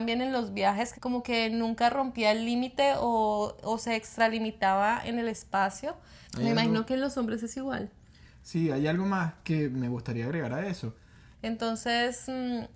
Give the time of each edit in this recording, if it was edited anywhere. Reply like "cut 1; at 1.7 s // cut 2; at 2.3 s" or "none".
cut 1; at 0.9 s // cut 2; at 6.3 s // cut 3; at 11.3 s